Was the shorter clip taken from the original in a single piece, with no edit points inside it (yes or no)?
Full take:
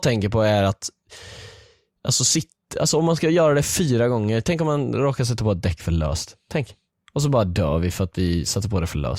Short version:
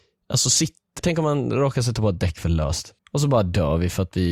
no